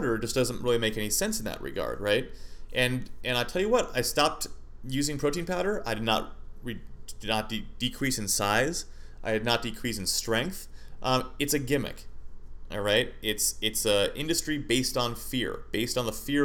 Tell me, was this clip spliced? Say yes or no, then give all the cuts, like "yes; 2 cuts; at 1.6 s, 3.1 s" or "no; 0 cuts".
no; 0 cuts